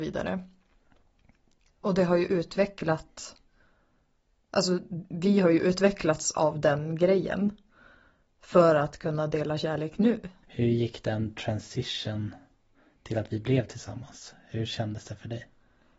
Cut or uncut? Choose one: cut